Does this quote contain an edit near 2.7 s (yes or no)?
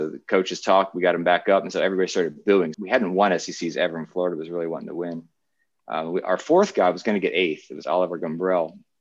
yes